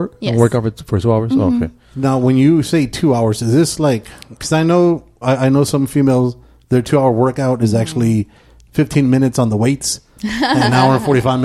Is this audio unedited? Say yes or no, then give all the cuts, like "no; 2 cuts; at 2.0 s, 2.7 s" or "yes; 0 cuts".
no; 1 cut; at 5.2 s